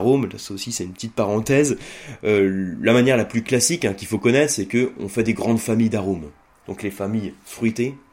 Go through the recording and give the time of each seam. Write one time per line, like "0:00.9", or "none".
0:06.6